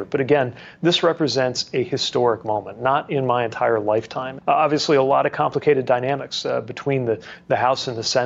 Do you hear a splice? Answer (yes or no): yes